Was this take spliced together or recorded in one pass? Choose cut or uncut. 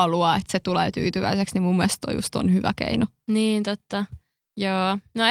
uncut